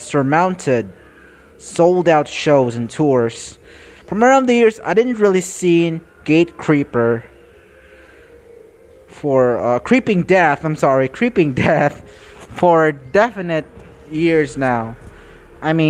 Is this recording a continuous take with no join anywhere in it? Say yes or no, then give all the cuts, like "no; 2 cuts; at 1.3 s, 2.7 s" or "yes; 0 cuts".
yes; 0 cuts